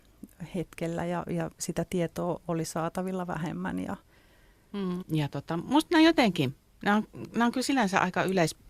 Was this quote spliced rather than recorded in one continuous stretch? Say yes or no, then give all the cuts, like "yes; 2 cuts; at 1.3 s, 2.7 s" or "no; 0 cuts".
yes; 1 cut; at 5.0 s